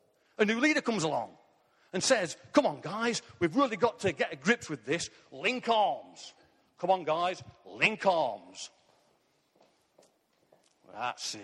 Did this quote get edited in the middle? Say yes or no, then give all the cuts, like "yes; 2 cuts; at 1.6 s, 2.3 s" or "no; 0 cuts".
no; 0 cuts